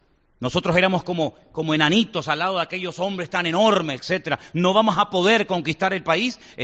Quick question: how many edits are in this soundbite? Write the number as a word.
one